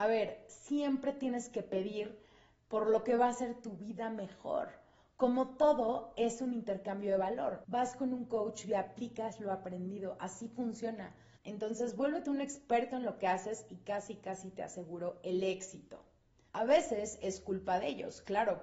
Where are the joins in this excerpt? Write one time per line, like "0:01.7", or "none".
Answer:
0:07.6
0:11.4
0:16.5

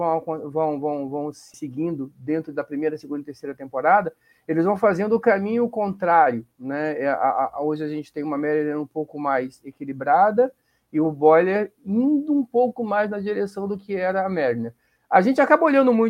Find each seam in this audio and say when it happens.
none

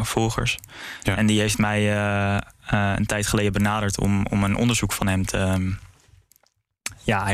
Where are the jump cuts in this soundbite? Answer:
none

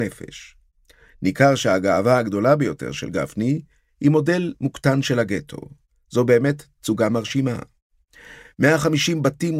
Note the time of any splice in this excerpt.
0:01.0

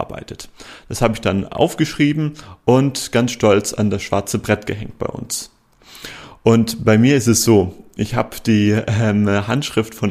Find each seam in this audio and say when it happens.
none

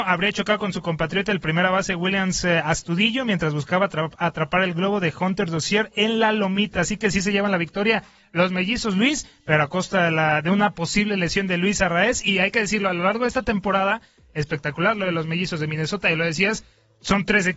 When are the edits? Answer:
none

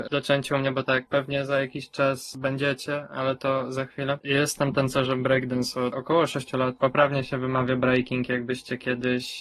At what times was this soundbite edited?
0:01.1

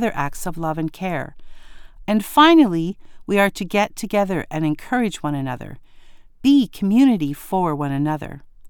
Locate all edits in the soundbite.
0:02.0

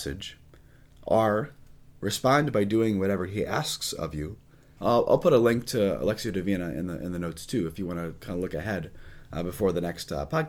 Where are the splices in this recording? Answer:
0:04.8

